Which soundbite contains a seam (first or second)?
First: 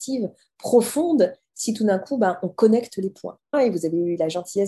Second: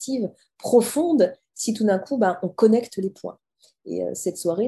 first